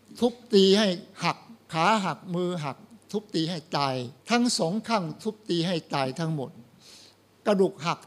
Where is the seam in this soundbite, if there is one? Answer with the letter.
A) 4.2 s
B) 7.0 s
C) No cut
A